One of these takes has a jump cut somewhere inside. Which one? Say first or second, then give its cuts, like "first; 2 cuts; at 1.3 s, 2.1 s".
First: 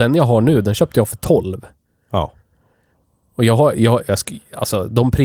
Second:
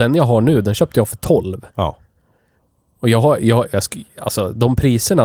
second; 1 cut; at 1.7 s